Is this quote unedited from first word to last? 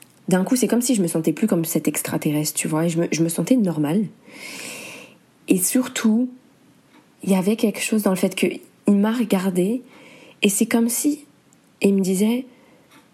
yes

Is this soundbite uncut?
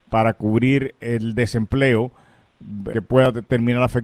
no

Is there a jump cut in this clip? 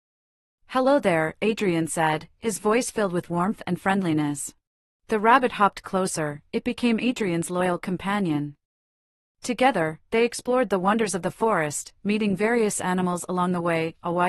yes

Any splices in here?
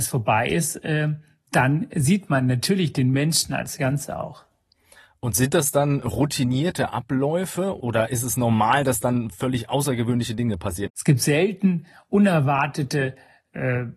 no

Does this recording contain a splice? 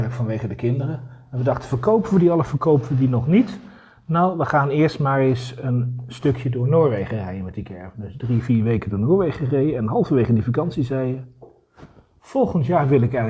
no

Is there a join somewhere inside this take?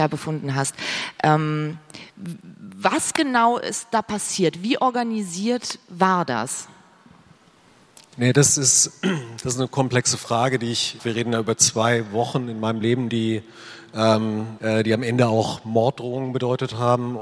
yes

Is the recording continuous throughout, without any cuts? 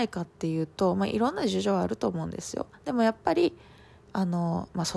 yes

